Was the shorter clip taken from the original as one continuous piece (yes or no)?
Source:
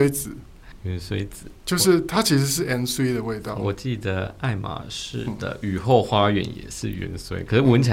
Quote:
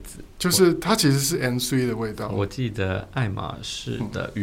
yes